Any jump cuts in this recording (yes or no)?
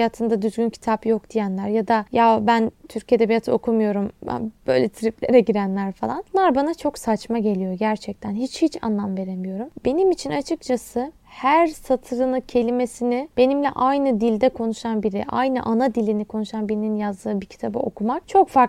no